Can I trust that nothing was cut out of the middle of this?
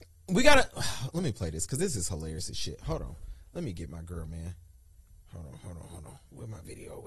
yes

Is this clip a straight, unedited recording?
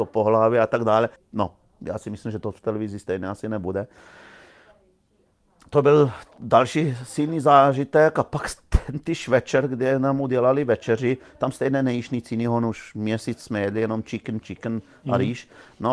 no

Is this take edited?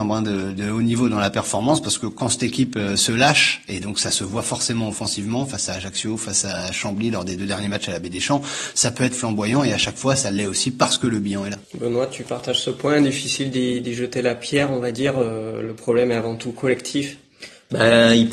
yes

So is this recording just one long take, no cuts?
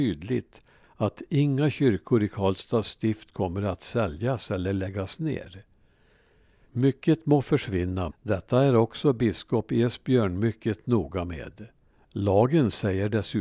no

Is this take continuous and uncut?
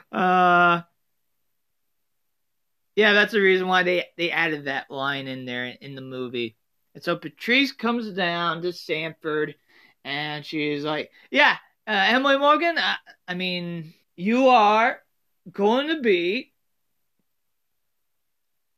no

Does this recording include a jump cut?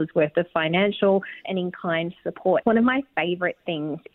yes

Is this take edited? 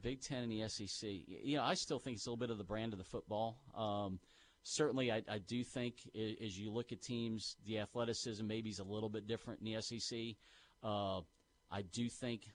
no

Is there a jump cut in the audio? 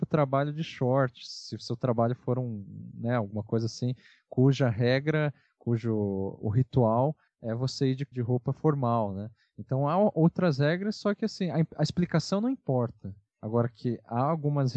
yes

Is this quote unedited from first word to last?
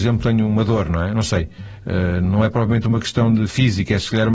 yes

